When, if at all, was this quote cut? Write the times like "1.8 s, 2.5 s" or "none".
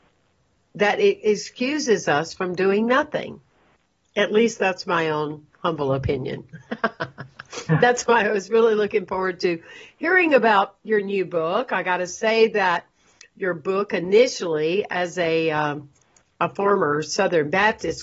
none

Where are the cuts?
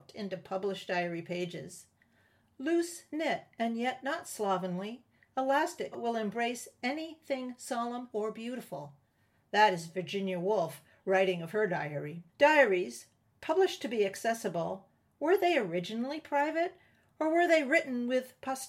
5.9 s, 8.1 s, 12.3 s

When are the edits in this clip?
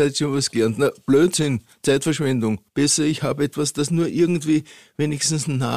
2.7 s

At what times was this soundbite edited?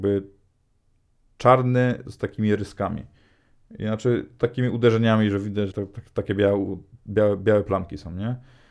5.7 s

